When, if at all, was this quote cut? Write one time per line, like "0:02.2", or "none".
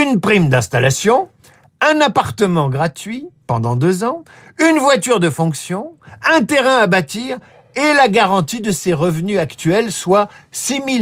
none